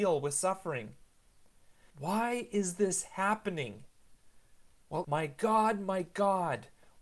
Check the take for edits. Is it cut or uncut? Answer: cut